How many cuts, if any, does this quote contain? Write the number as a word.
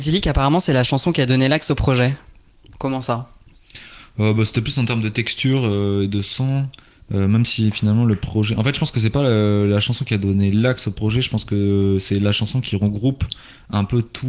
zero